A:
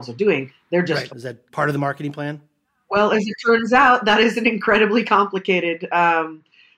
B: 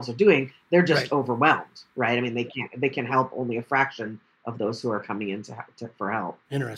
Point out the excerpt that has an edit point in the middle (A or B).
A